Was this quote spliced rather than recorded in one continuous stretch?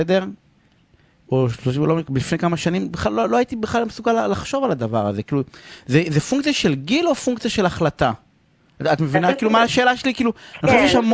no; 0 cuts

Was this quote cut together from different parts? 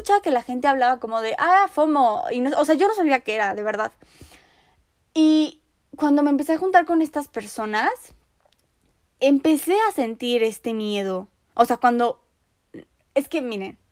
no; 0 cuts

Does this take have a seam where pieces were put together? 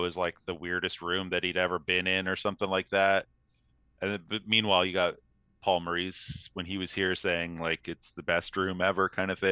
no; 0 cuts

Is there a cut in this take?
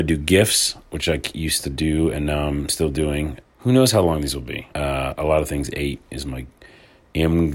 yes; 2 cuts; at 3.4 s, 4.7 s

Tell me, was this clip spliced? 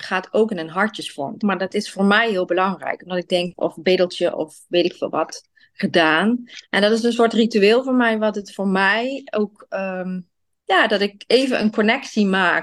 yes; 3 cuts; at 1.4 s, 3.5 s, 6.6 s

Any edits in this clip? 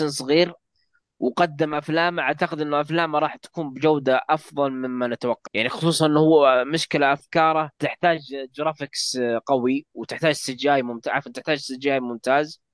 yes; 2 cuts; at 5.5 s, 7.7 s

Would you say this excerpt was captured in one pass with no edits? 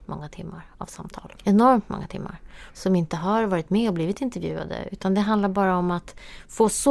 no; 1 cut; at 2.7 s

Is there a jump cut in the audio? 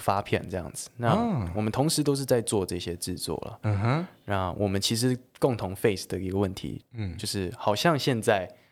yes; 1 cut; at 6.8 s

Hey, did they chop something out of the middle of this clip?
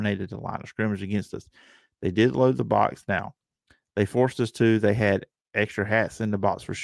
no; 0 cuts

